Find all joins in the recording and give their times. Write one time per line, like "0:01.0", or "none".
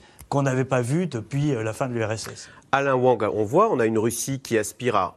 none